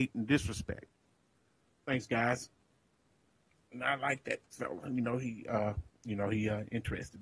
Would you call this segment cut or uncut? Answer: uncut